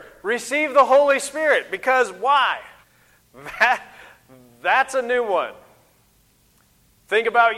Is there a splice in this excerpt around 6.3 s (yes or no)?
no